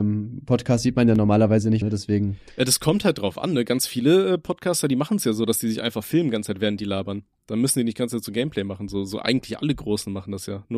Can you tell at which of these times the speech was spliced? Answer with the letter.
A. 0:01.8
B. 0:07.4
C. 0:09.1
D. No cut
A